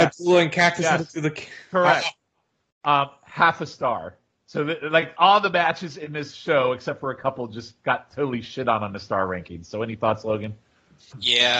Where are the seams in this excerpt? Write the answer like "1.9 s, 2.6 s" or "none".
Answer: none